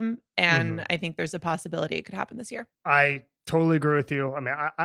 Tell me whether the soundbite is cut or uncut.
cut